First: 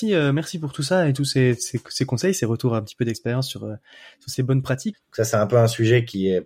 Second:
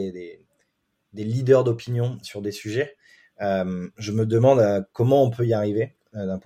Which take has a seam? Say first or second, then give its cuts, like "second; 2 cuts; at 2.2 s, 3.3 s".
first; 1 cut; at 4.9 s